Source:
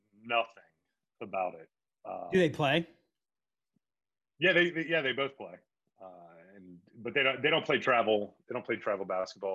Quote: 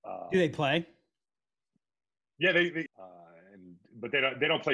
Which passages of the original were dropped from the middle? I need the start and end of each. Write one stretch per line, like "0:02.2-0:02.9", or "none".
0:04.9-0:05.9